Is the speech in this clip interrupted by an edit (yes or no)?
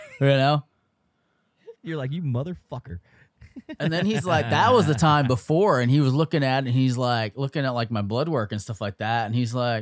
no